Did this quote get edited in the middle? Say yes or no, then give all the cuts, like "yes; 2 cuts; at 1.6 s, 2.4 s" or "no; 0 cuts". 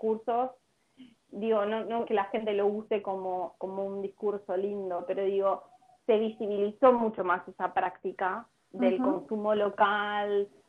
yes; 1 cut; at 2.1 s